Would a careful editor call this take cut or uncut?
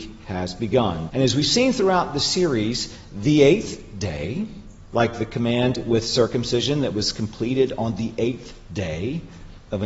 cut